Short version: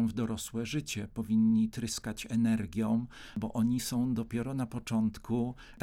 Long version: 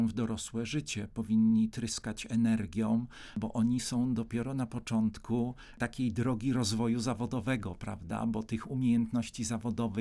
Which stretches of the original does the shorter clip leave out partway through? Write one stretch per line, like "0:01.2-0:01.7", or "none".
none